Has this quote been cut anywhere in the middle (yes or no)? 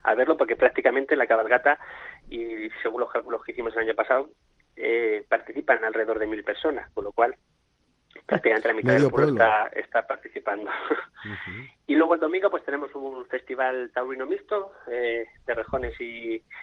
no